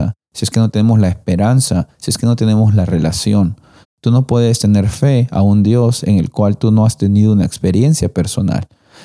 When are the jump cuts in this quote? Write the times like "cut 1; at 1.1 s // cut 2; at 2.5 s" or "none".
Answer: cut 1; at 3.8 s